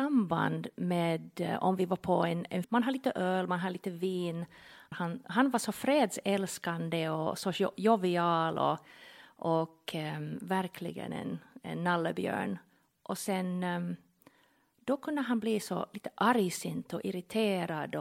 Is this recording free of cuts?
no; 2 cuts; at 2.6 s, 4.9 s

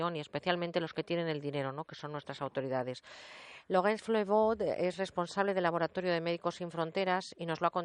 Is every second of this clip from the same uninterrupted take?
yes; 0 cuts

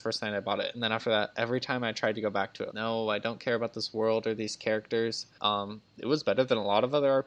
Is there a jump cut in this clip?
yes; 2 cuts; at 2.7 s, 5.4 s

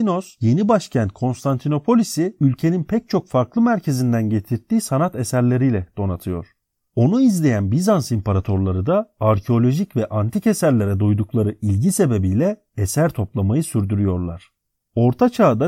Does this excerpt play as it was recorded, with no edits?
yes; 0 cuts

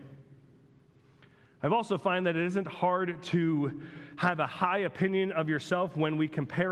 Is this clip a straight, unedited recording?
yes; 0 cuts

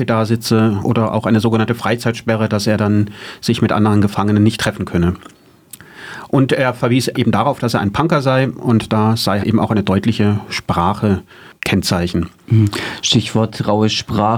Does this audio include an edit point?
yes; 2 cuts; at 7.1 s, 9.4 s

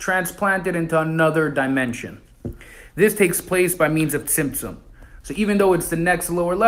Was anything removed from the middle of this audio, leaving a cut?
yes; 1 cut; at 5.2 s

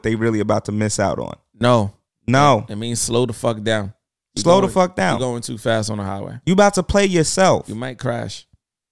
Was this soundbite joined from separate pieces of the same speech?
no; 0 cuts

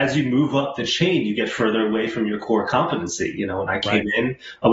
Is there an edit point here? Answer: no; 0 cuts

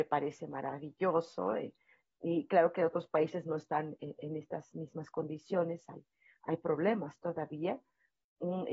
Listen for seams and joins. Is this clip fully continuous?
yes; 0 cuts

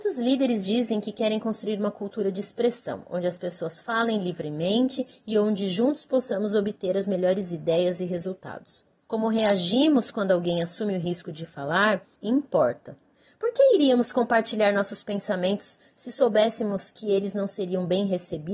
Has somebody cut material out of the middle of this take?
yes; 1 cut; at 12.2 s

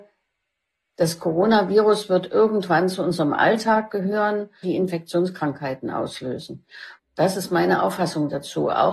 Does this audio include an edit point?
yes; 2 cuts; at 4.6 s, 7.0 s

